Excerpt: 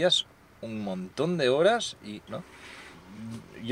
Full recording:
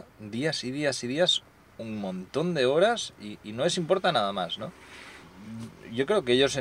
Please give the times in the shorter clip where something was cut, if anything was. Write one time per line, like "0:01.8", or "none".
0:02.3